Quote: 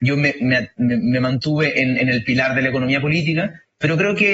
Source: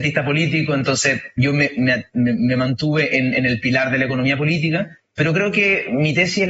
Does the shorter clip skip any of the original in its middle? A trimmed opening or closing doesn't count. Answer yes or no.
no